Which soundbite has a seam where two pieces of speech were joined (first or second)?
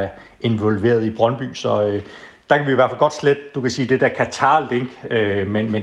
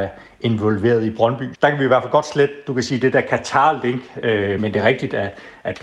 second